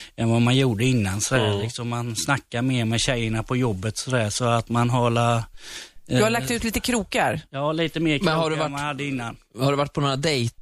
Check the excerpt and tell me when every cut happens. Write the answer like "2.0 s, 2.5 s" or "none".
none